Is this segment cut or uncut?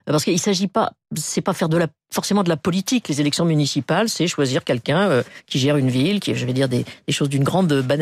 uncut